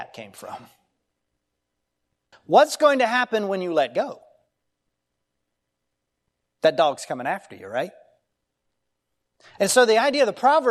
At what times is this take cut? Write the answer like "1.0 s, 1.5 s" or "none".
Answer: 2.3 s